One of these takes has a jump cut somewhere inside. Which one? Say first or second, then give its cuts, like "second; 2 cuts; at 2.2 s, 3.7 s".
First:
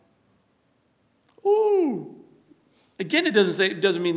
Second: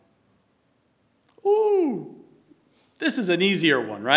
first; 1 cut; at 2.9 s